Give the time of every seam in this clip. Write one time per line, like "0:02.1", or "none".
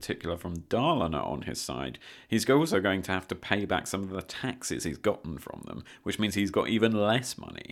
none